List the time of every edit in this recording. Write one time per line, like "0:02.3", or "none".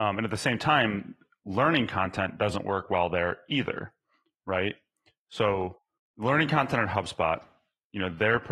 0:05.2